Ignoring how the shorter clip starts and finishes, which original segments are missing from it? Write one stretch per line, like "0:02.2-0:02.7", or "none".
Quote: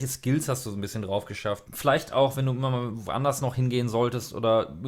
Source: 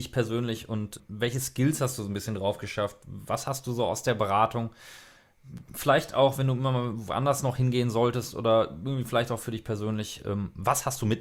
0:03.0-0:05.7